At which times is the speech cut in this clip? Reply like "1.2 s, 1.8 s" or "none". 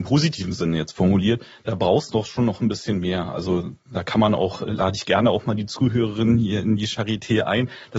none